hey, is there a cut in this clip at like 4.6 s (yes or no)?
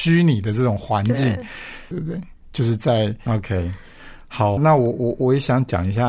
yes